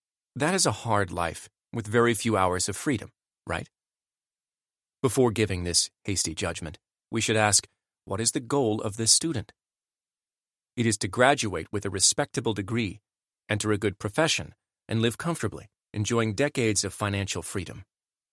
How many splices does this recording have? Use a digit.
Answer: 0